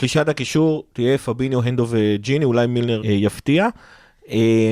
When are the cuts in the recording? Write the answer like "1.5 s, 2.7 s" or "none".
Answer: 3.0 s